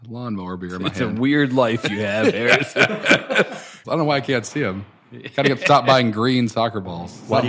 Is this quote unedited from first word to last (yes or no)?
no